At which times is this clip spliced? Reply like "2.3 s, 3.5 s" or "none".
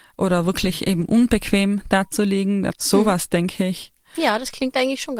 2.7 s